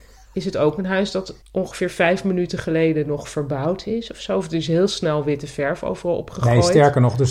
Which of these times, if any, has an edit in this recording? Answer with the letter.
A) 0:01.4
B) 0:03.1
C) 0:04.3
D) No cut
A